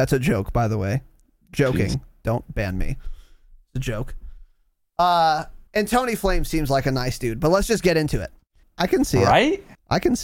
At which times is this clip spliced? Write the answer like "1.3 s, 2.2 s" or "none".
5.7 s, 8.6 s